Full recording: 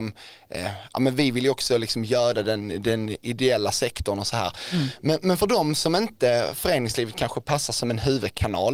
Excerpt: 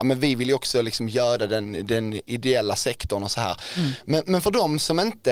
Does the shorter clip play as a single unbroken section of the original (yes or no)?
yes